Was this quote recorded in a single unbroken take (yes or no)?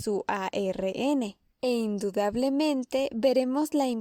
no